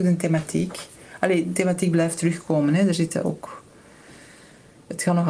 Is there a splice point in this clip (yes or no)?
no